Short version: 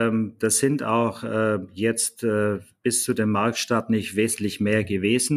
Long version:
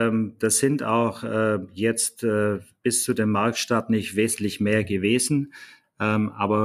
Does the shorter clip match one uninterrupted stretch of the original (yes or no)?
yes